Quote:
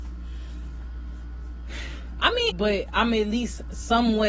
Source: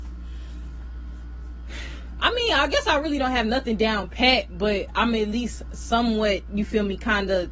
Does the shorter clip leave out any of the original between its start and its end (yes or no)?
yes